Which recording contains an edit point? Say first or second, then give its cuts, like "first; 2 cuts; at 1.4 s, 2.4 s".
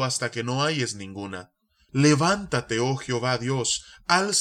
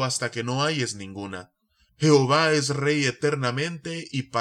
first; 1 cut; at 1.9 s